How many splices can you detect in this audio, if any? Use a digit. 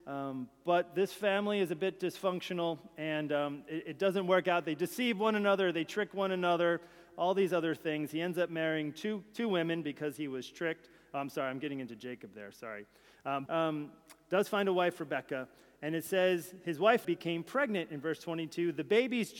2